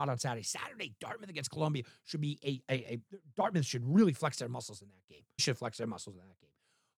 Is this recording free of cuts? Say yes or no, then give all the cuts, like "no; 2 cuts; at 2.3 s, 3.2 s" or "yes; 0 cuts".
no; 1 cut; at 5.4 s